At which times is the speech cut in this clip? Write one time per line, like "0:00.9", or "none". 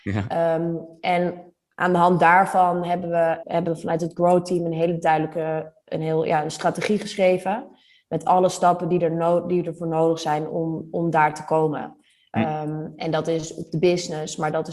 0:03.4